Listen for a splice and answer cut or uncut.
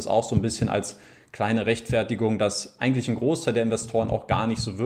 uncut